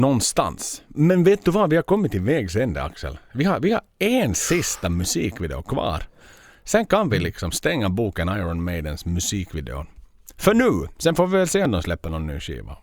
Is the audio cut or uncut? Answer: uncut